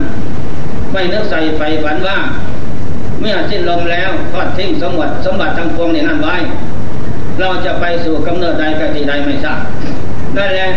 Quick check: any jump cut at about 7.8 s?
no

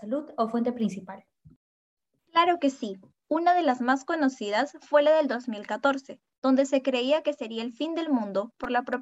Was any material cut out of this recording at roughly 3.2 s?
yes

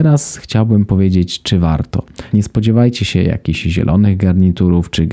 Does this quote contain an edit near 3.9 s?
no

